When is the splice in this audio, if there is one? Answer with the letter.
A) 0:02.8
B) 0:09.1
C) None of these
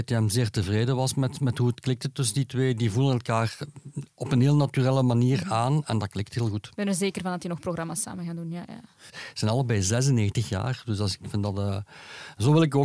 B